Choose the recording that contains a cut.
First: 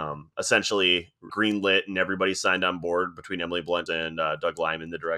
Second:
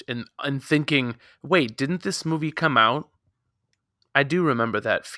first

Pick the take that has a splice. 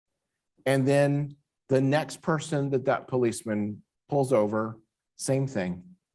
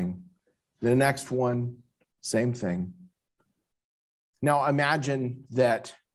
second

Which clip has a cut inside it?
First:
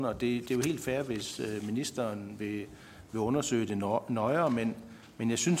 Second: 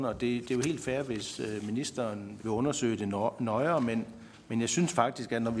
second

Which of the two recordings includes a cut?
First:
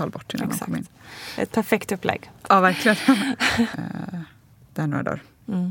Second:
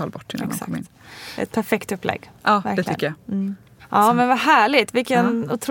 first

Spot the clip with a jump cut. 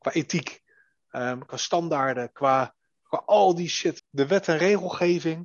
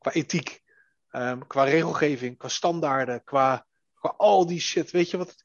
first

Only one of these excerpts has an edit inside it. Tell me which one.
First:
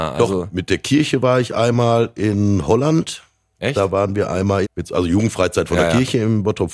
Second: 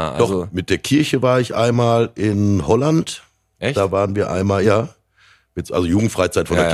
first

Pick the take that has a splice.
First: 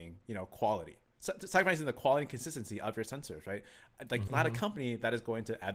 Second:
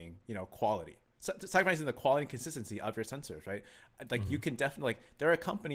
first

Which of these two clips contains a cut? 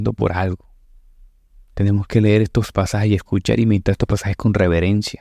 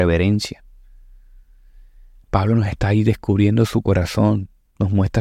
first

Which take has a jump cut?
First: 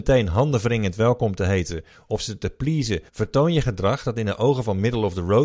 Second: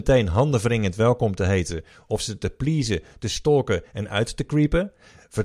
first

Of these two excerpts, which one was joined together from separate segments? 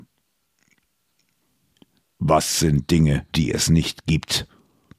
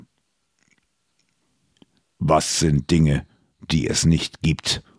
first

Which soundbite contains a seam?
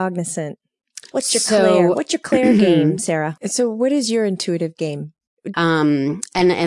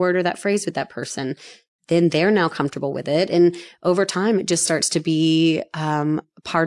first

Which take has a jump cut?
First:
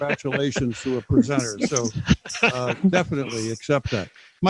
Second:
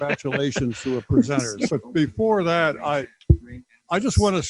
second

